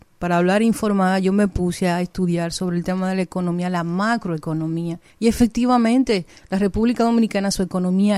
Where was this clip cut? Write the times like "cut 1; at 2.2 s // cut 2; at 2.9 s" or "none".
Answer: cut 1; at 5.1 s

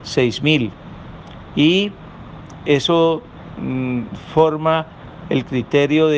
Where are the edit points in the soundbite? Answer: cut 1; at 1.5 s

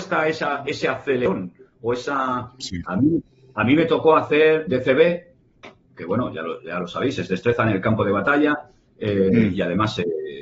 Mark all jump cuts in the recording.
cut 1; at 2.8 s // cut 2; at 4.7 s

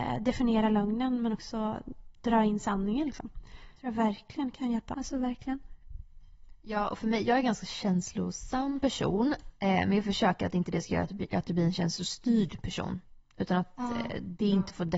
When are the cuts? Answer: cut 1; at 4.9 s

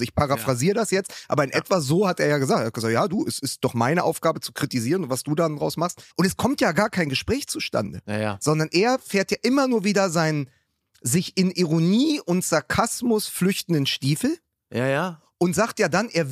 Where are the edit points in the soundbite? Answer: cut 1; at 6.1 s

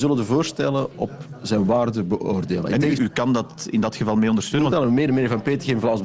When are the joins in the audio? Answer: cut 1; at 3.0 s // cut 2; at 4.7 s

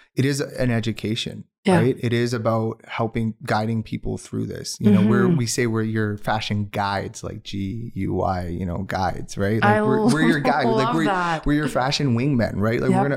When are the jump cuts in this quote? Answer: none

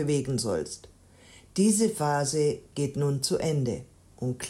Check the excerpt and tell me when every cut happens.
none

